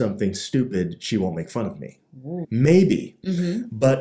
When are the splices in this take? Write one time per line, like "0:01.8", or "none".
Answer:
0:02.4